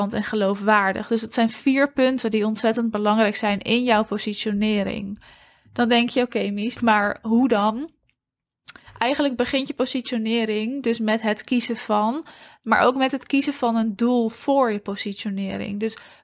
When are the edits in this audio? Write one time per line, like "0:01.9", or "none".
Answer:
0:06.8